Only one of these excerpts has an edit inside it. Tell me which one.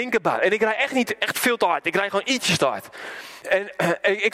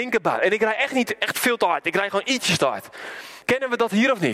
second; 1 cut; at 3.4 s

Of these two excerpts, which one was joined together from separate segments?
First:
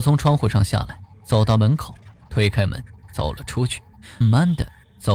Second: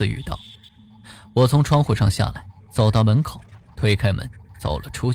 first; 1 cut; at 4.2 s

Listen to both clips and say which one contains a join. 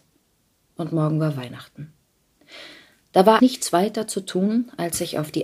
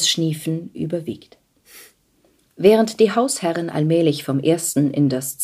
first; 1 cut; at 3.4 s

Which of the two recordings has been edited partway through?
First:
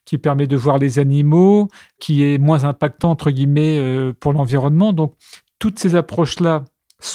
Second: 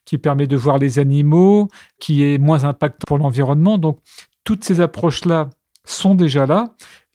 second; 1 cut; at 3.0 s

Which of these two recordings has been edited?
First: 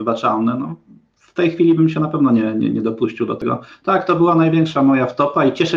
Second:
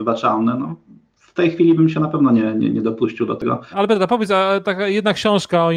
second; 1 cut; at 3.7 s

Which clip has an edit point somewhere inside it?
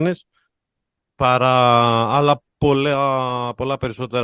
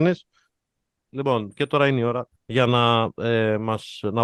second; 2 cuts; at 1.1 s, 2.4 s

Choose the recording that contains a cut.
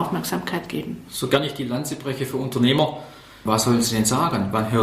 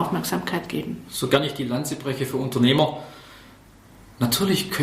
first; 1 cut; at 3.5 s

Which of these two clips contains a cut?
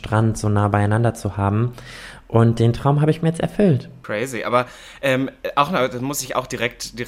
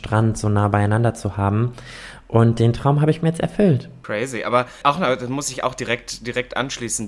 second; 1 cut; at 4.8 s

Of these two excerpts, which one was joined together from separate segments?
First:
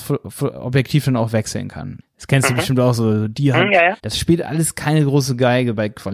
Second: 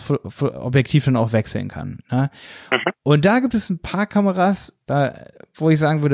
first; 2 cuts; at 2.0 s, 4.0 s

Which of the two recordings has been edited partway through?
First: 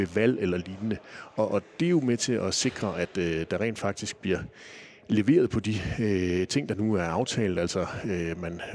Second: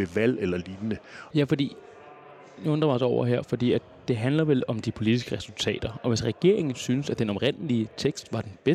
second; 1 cut; at 1.3 s

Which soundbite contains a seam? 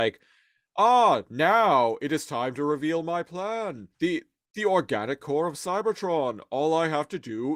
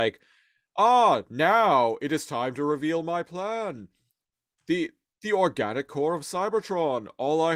first; 1 cut; at 3.9 s

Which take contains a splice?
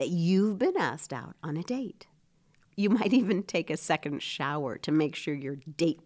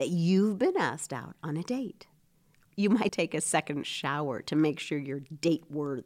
second; 1 cut; at 3.1 s

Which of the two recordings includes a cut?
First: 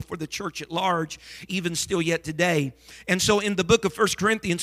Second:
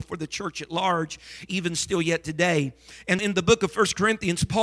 second; 1 cut; at 3.2 s

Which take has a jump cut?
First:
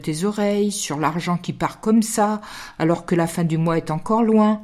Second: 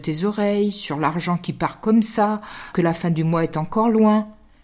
second; 1 cut; at 2.7 s

